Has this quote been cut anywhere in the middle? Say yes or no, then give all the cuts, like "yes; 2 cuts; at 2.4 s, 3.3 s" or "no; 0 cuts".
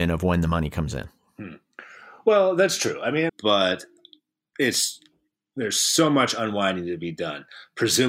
yes; 1 cut; at 3.3 s